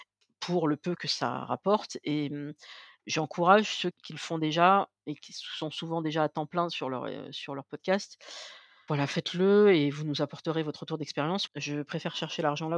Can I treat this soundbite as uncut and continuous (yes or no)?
no